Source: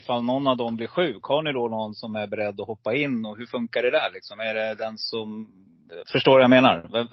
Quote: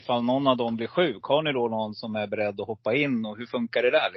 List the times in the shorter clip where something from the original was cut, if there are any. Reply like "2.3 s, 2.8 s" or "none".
none